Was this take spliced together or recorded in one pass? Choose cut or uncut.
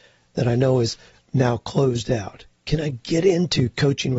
uncut